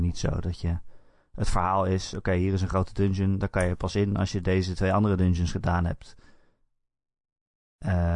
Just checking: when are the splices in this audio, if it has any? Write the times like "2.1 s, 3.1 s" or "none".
none